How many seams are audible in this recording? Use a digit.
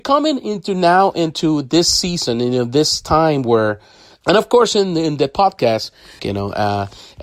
2